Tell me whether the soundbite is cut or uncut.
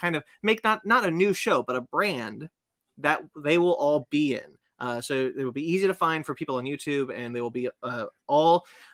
uncut